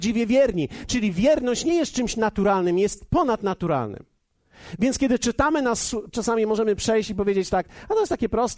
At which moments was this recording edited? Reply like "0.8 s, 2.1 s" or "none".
6.1 s